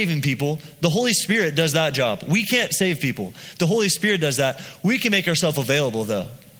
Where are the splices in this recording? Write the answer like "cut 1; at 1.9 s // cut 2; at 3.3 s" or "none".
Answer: none